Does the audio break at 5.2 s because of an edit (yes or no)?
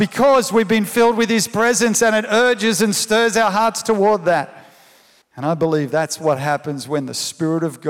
yes